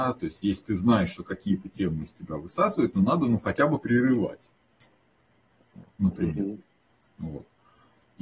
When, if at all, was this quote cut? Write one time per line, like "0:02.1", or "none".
none